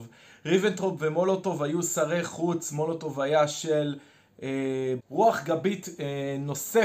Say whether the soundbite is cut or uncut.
cut